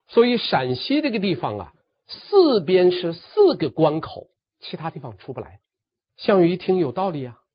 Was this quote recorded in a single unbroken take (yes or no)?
no